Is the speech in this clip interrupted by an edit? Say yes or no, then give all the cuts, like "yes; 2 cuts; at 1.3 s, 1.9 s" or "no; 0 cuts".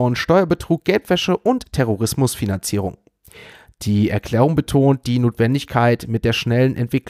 no; 0 cuts